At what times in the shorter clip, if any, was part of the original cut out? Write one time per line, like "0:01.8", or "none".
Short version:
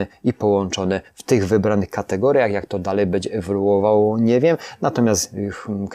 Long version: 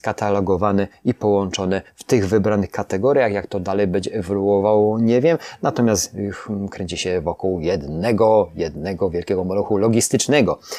none